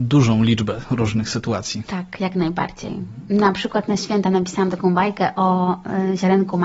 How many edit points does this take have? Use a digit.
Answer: 0